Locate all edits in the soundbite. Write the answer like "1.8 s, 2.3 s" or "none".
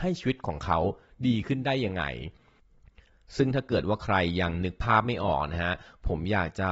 none